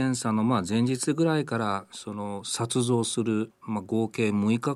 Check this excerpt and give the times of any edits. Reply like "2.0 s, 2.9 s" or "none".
3.6 s